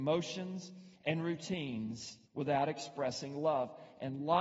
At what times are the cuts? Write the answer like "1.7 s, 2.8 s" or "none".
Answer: 2.3 s

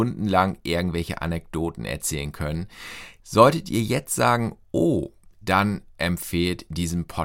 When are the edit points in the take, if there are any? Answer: 3.2 s, 5.4 s

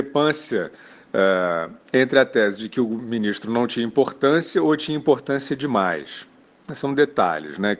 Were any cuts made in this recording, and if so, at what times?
none

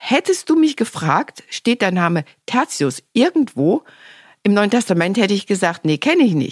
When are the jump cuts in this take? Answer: none

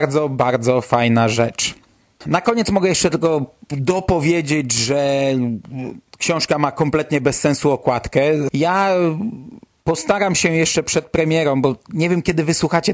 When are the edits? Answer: 8.5 s

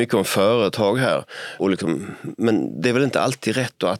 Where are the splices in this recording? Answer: 1.6 s

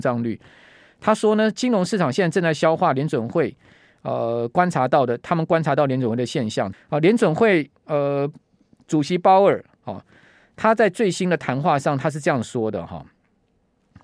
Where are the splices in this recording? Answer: 6.7 s

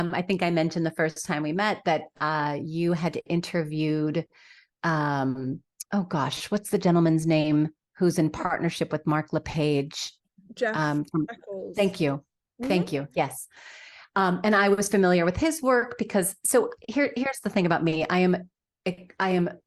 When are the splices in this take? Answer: none

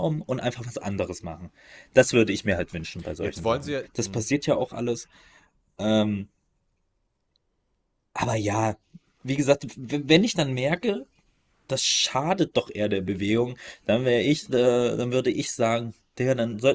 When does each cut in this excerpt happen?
3.9 s

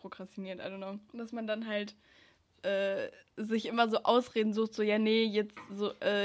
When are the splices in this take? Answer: 1.1 s

